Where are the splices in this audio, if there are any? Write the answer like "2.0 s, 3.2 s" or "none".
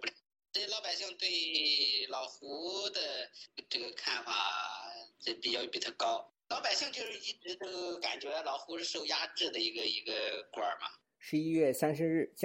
none